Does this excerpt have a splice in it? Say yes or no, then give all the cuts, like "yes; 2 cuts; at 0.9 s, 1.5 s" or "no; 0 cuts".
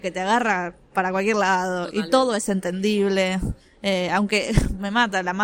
no; 0 cuts